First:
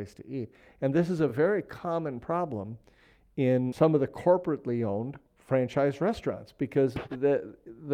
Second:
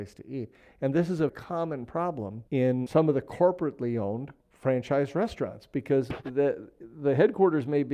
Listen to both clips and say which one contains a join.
second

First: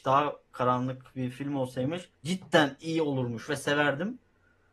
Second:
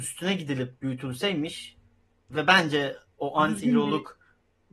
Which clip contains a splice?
first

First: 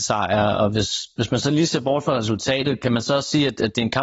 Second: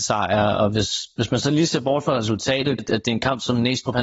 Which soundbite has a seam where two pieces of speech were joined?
second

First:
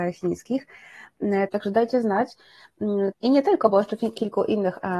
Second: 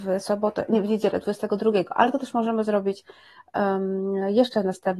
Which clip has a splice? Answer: first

